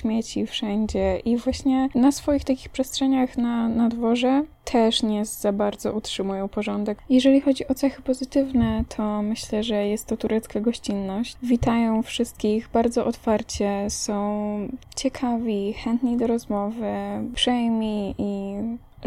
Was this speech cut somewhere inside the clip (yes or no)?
yes